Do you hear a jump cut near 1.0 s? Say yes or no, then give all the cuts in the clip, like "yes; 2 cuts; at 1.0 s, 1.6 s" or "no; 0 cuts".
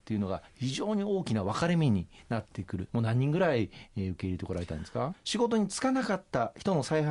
no; 2 cuts; at 2.9 s, 5.1 s